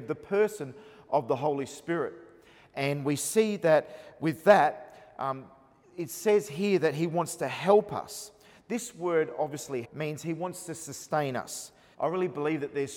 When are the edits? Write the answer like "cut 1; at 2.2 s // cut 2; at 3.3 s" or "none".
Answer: cut 1; at 9.8 s // cut 2; at 11.9 s